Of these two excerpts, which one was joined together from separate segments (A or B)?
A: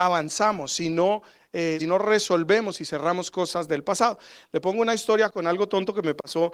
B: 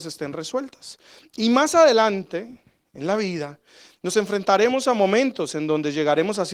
A